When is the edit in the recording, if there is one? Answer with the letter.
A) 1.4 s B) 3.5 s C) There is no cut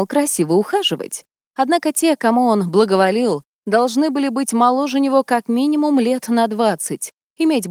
A